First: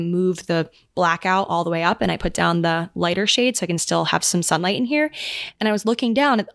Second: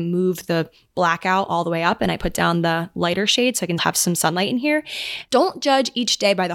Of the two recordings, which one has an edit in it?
second; 2 cuts; at 3.8 s, 5.3 s

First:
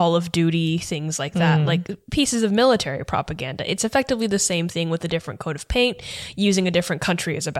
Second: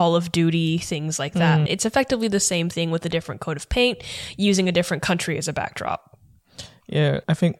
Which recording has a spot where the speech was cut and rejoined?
second; 1 cut; at 1.7 s

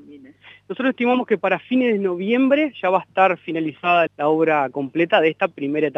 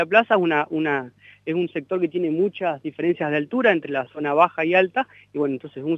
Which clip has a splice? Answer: first; 1 cut; at 4.1 s

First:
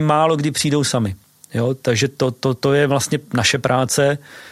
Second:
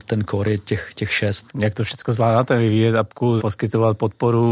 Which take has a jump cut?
second; 2 cuts; at 1.5 s, 3.4 s

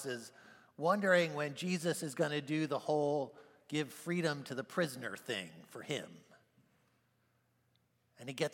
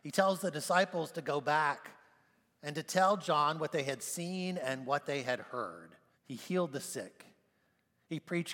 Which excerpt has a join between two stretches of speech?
second; 1 cut; at 6.1 s

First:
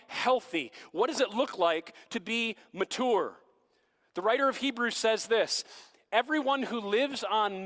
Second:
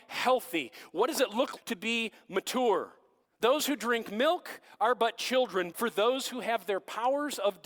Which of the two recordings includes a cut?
second; 3 cuts; at 1.6 s, 3.2 s, 5.7 s

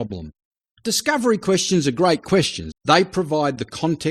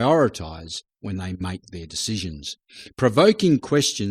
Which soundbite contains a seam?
first; 1 cut; at 2.7 s

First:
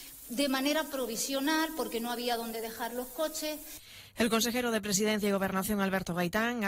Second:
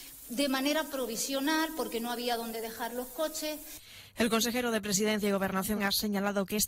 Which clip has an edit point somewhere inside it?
second; 1 cut; at 5.8 s

